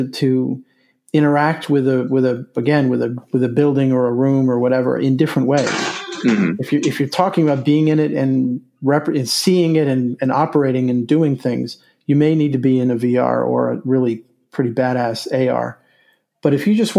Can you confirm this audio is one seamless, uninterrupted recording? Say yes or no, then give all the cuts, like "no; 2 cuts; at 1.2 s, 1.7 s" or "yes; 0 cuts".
yes; 0 cuts